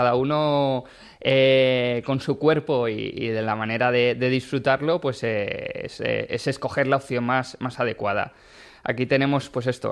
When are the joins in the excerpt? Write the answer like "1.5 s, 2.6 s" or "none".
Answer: none

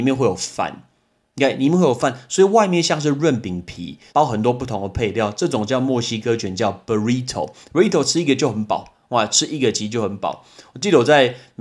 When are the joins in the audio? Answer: 4.1 s

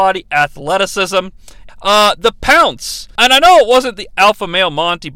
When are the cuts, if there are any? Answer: 1.7 s, 3.2 s

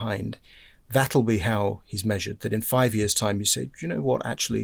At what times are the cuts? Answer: none

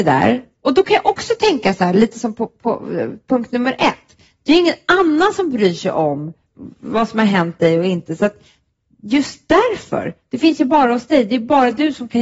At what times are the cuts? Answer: none

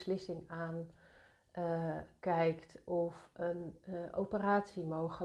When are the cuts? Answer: none

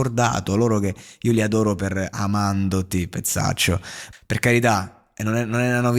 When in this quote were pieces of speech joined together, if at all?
4.1 s

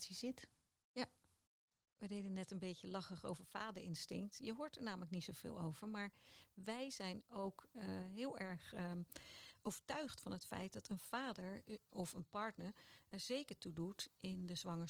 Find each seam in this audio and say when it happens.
none

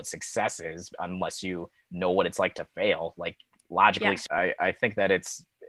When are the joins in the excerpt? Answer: 4.3 s

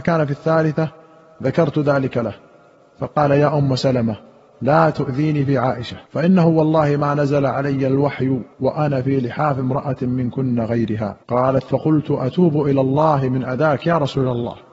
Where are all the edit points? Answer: 6.1 s, 8.5 s, 11.2 s

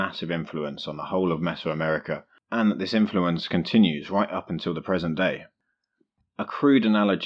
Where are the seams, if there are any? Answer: none

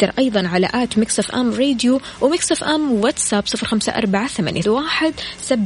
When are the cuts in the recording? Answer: 4.6 s

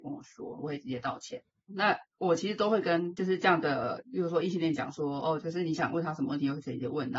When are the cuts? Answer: 1.7 s, 5.4 s

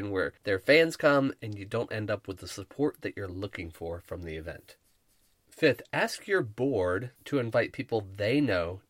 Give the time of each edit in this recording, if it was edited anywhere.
7.2 s

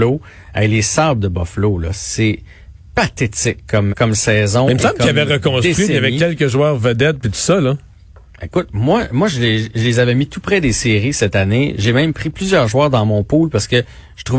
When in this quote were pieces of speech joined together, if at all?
3.9 s

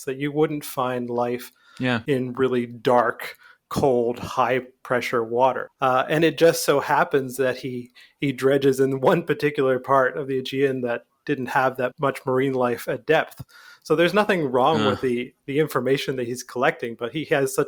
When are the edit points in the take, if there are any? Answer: 5.7 s, 11.9 s

